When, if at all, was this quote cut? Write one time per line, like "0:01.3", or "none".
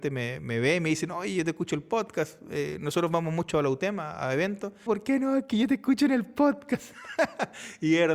0:04.9